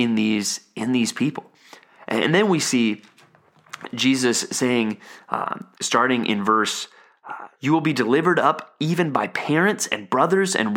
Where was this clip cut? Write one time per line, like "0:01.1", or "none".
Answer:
0:05.7
0:07.6